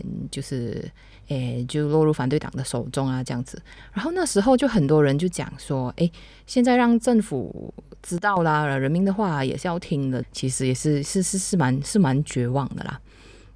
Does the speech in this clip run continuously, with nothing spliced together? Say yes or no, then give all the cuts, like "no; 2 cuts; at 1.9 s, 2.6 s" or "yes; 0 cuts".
no; 1 cut; at 10.2 s